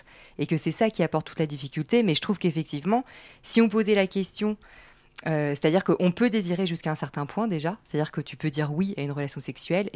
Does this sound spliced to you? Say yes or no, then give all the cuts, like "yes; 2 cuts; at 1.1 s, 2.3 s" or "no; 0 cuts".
no; 0 cuts